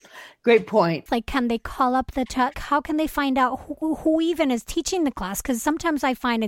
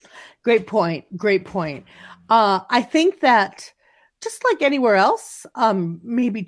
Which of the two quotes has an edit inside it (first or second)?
first